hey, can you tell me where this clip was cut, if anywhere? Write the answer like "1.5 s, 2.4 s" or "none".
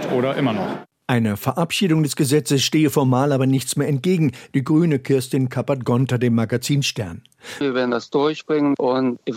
4.5 s, 7.6 s